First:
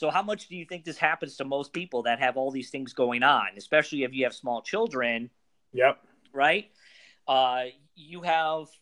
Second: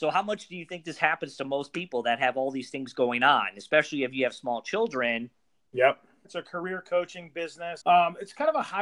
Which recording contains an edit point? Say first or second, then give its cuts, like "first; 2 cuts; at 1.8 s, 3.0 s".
second; 2 cuts; at 6.2 s, 7.8 s